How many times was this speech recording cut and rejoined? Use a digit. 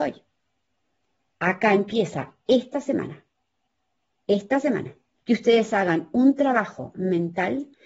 1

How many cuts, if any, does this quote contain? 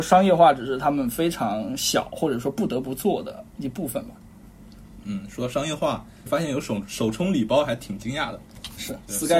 1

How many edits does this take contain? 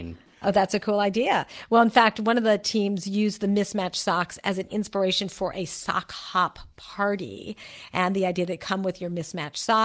0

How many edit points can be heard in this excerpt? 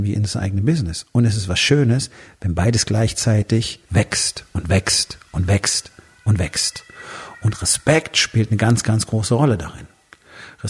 1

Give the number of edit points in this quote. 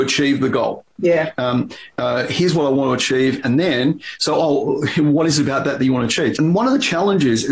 2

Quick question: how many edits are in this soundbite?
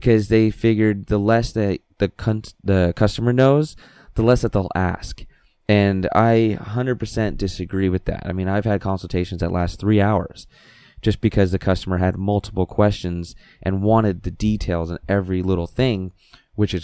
0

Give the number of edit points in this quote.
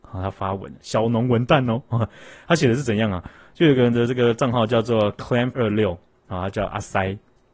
1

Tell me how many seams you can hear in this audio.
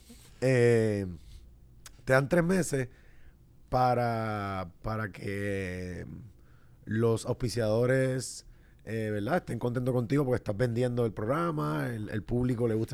0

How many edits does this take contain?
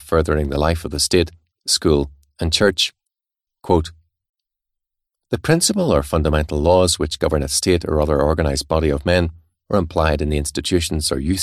2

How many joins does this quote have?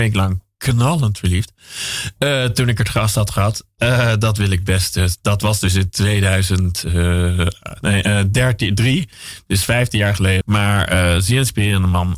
1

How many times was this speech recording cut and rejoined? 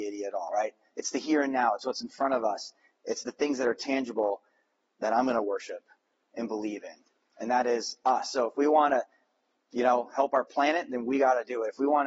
0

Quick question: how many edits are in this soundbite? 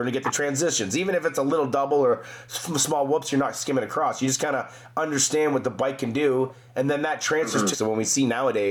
1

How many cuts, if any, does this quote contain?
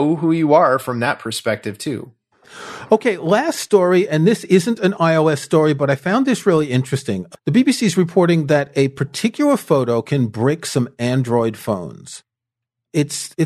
0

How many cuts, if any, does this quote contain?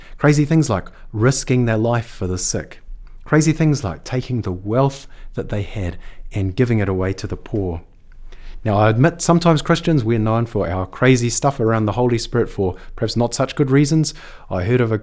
0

